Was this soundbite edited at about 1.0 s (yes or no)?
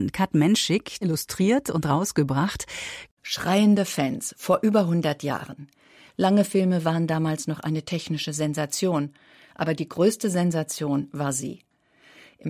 yes